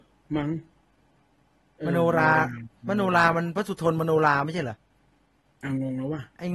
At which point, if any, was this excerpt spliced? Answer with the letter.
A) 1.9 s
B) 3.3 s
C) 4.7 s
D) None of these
D